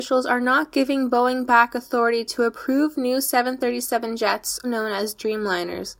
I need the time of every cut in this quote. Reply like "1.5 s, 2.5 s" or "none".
4.6 s